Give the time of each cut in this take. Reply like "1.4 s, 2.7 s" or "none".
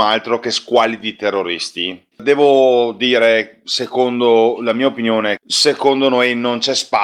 2.1 s, 5.4 s